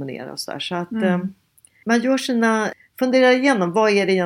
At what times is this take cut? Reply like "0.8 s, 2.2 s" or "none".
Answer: 1.8 s